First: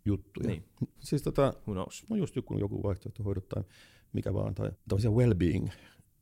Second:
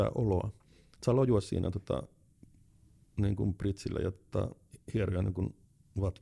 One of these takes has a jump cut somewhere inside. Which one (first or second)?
first